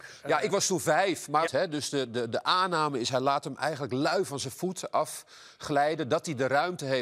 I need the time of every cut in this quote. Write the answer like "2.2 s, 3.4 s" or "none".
1.5 s